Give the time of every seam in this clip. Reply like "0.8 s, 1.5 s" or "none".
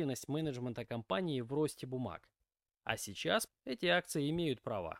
3.5 s